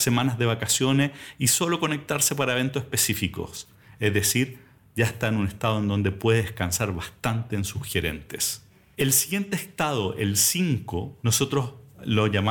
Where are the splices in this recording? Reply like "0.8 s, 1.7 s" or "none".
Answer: none